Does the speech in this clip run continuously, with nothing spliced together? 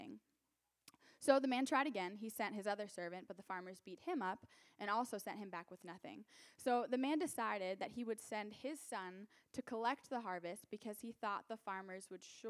yes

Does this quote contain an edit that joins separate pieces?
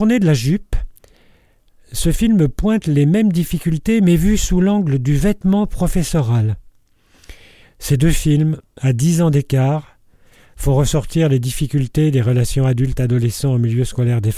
yes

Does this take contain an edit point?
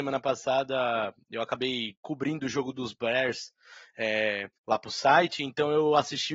yes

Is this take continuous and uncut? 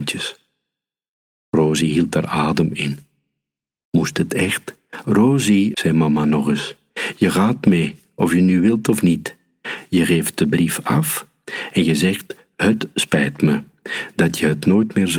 no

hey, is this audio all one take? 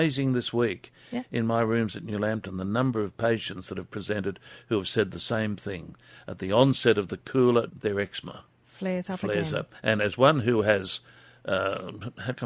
no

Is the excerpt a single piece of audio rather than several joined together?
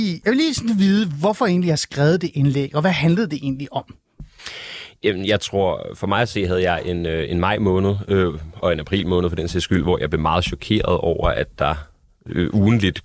yes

